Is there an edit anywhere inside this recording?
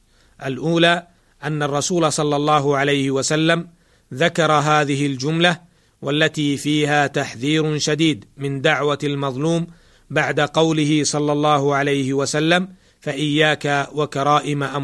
no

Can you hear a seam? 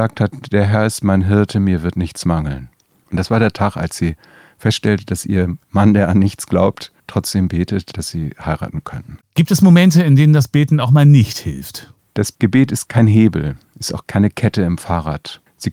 no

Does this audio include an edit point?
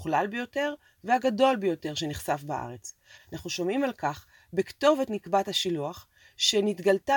yes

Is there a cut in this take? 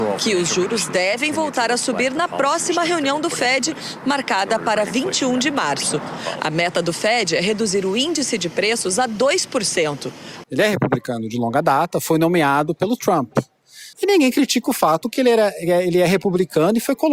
yes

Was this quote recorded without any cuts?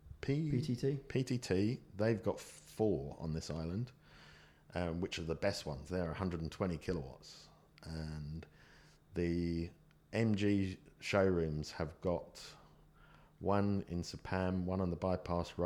yes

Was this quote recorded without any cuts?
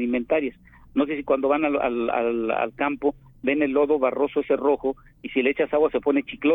yes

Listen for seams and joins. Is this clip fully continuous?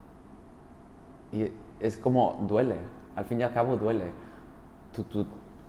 yes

